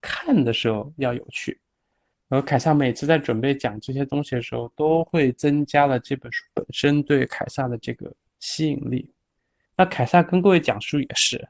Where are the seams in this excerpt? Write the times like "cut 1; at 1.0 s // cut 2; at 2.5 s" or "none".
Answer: cut 1; at 2.1 s // cut 2; at 9.6 s